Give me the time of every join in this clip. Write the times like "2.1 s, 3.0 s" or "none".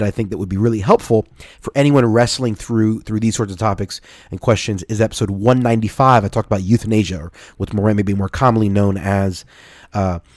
none

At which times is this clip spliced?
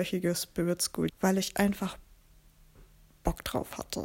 1.1 s

